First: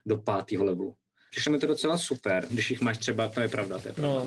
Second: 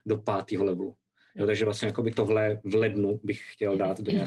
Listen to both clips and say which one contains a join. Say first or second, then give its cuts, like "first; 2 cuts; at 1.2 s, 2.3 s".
first; 2 cuts; at 1.3 s, 2.5 s